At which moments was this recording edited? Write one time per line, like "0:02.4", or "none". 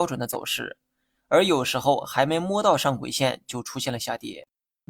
0:01.1